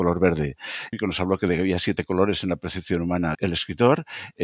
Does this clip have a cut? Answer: yes; 2 cuts; at 0.9 s, 3.3 s

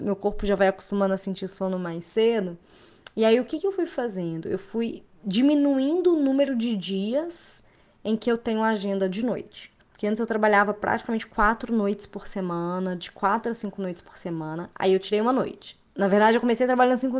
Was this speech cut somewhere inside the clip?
yes; 1 cut; at 9.8 s

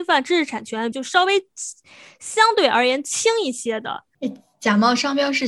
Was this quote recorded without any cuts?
no; 2 cuts; at 0.9 s, 4.1 s

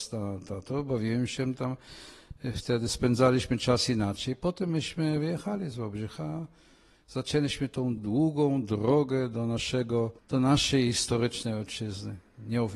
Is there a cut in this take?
yes; 2 cuts; at 8.0 s, 10.2 s

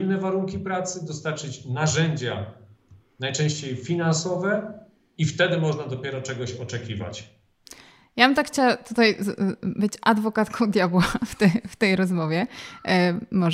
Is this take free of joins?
yes; 0 cuts

